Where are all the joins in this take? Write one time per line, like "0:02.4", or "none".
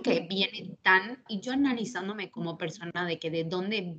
0:01.3